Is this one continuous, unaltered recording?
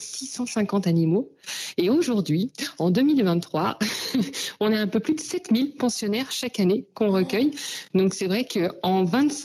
yes; 0 cuts

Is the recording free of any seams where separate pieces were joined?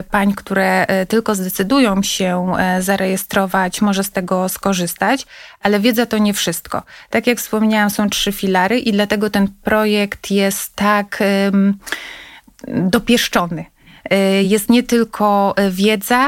yes; 0 cuts

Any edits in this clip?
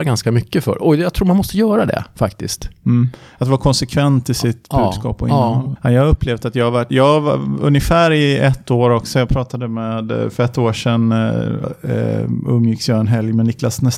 yes; 2 cuts; at 5.8 s, 11.6 s

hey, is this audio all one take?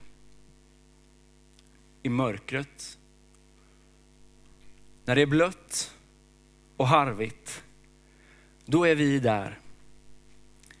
yes; 0 cuts

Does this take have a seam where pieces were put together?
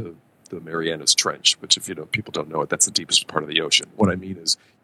no; 0 cuts

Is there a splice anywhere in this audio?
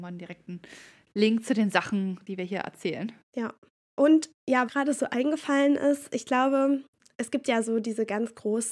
yes; 1 cut; at 4.7 s

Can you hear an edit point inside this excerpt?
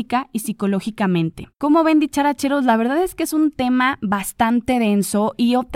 yes; 1 cut; at 1.5 s

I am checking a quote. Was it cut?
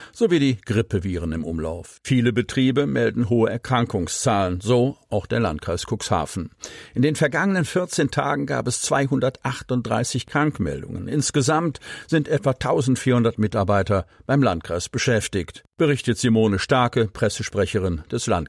no; 0 cuts

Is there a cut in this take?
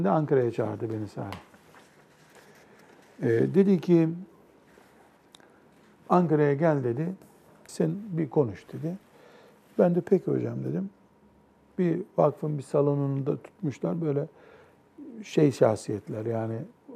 yes; 1 cut; at 7.7 s

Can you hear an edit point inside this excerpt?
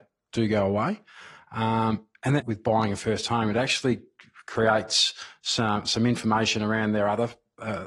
yes; 1 cut; at 2.4 s

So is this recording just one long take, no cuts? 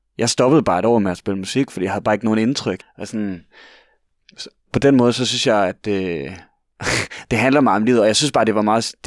no; 2 cuts; at 2.8 s, 4.7 s

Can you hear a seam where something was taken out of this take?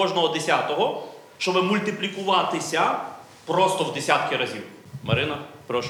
no; 0 cuts

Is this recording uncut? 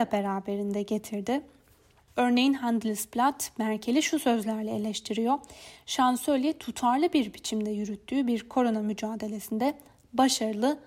yes; 0 cuts

